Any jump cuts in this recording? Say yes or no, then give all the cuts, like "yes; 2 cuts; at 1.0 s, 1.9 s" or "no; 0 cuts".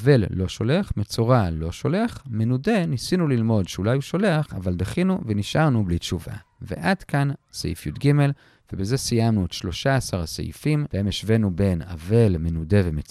no; 0 cuts